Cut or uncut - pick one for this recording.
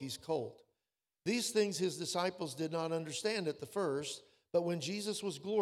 uncut